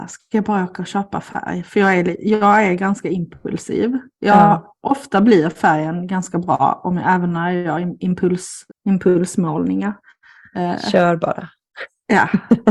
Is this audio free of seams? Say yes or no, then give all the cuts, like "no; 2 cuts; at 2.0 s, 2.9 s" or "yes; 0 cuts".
no; 2 cuts; at 8.7 s, 10.5 s